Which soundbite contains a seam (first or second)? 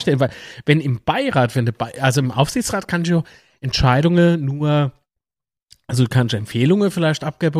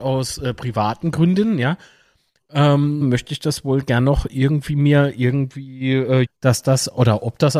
second